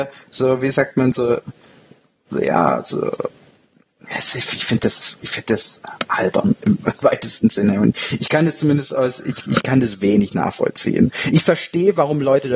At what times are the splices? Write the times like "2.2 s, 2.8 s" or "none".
none